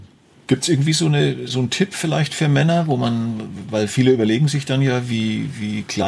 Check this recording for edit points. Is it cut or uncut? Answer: cut